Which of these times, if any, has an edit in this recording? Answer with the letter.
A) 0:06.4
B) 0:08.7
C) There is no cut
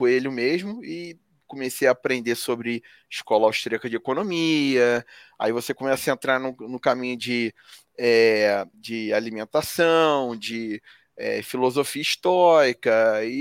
B